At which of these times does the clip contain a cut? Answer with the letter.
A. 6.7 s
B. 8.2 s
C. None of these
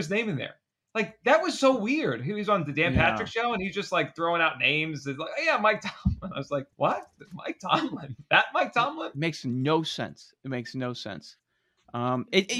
A